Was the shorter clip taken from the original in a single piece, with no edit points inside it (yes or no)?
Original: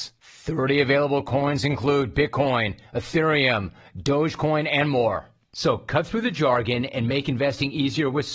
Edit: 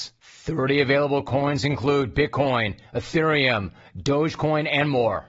yes